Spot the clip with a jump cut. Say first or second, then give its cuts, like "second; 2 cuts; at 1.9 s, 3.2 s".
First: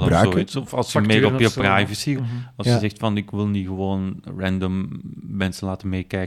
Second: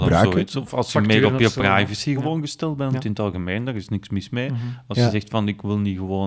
first; 1 cut; at 2.2 s